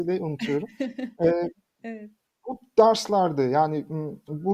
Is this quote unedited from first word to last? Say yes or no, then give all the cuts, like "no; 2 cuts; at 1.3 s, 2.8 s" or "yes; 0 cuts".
yes; 0 cuts